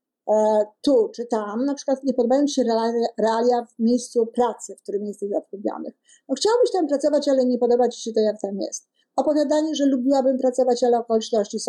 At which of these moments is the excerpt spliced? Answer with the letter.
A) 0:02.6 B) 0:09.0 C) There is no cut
B